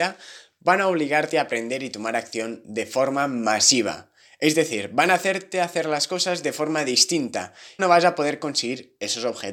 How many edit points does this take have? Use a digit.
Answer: 1